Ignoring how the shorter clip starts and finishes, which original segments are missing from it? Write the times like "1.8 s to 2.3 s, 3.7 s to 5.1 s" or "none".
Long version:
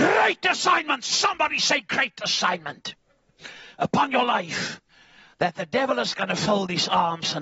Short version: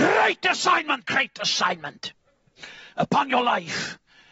1.0 s to 1.8 s

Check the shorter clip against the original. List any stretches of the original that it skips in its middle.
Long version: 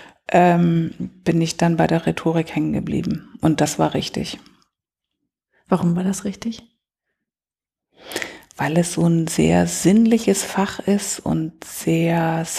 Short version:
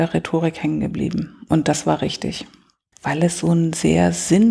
4.8 s to 8.5 s

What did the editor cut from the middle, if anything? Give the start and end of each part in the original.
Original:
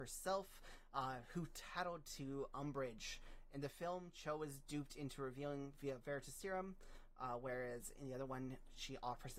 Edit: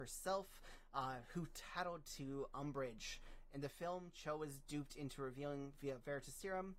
none

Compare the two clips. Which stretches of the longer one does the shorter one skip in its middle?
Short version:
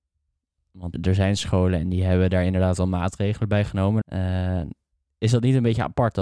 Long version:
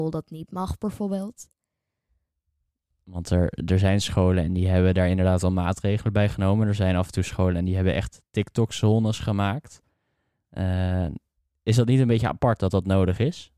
3.2 s to 3.6 s, 6.7 s to 10.5 s

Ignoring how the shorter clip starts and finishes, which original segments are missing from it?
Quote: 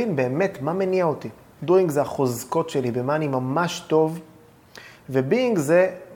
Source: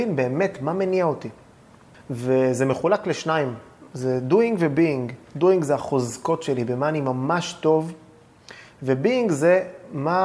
1.6 s to 5.3 s

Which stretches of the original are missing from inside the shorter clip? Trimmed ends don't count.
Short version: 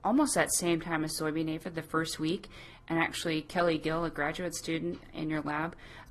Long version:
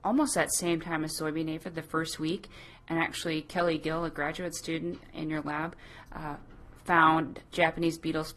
none

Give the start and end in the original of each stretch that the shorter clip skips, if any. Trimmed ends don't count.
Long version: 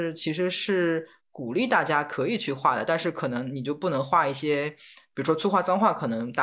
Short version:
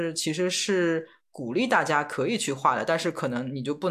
none

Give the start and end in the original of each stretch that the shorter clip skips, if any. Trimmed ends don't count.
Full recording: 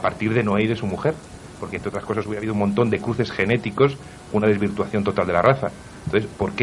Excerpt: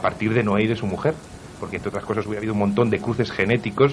none

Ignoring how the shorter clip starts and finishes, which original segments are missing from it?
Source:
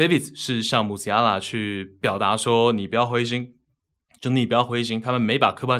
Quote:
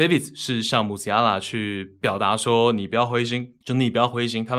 3.6 s to 4.2 s

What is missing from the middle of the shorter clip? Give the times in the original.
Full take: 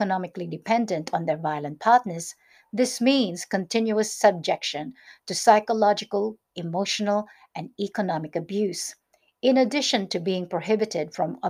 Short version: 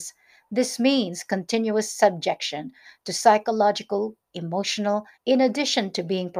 7.4 s to 9.3 s

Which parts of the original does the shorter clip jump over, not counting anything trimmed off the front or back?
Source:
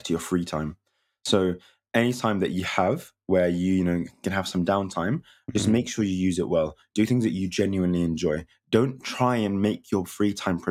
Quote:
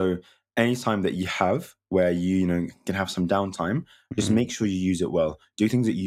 none

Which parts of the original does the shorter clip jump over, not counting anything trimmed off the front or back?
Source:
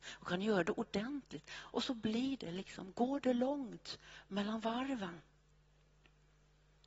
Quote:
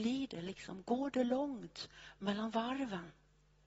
none

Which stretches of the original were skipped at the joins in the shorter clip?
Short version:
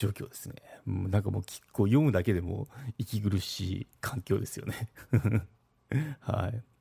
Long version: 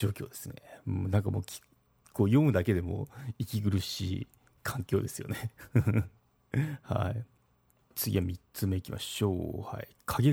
1.7 s to 2.1 s, 4.4 s to 4.6 s

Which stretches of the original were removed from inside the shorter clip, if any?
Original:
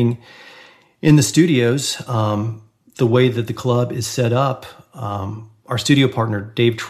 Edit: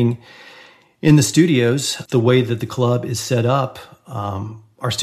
2.0 s to 2.9 s

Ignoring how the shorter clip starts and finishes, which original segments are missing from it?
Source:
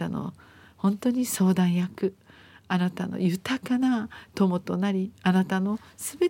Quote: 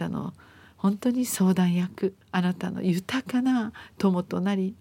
2.2 s to 2.6 s

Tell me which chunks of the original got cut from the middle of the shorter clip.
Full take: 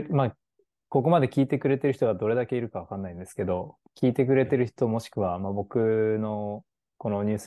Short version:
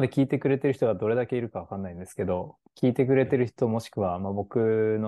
none

